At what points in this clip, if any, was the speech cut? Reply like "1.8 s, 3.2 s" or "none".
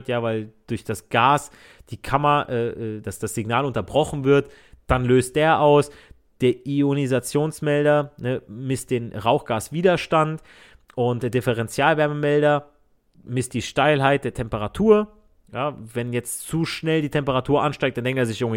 none